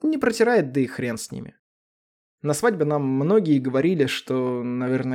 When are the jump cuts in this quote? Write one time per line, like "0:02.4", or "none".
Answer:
none